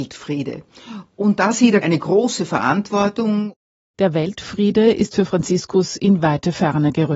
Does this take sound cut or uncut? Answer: cut